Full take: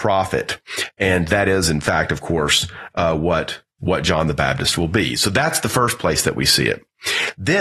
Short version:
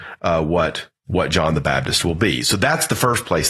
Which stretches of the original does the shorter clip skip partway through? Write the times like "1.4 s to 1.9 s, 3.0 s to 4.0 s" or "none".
none